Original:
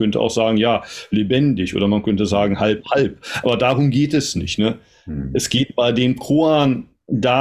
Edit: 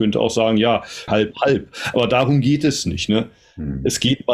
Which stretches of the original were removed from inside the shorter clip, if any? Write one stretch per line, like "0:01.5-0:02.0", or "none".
0:01.1-0:02.6